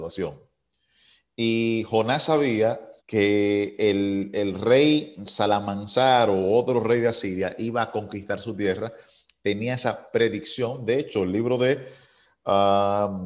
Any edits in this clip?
yes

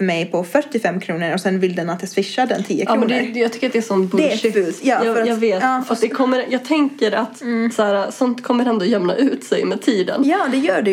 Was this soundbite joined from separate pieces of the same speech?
no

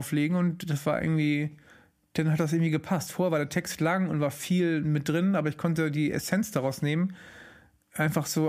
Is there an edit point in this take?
no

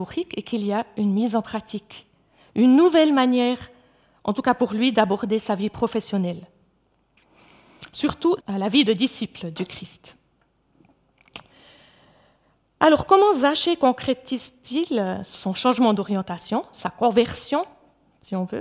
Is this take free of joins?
no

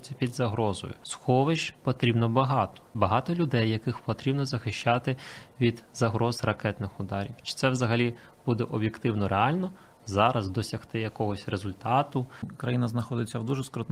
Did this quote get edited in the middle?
no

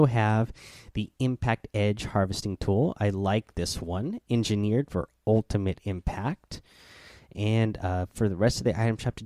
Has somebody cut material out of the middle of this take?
no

